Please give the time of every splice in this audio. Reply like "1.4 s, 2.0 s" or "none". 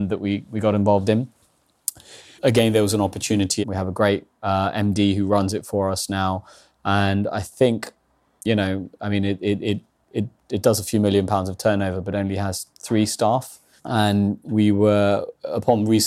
2.4 s, 3.6 s, 13.8 s